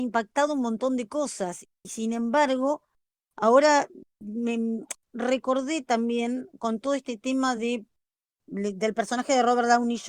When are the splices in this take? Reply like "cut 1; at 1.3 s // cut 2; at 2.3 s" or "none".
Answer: none